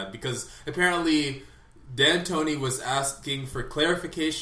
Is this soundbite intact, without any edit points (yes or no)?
yes